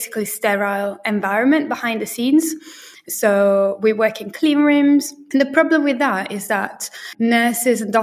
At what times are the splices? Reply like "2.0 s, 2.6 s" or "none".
none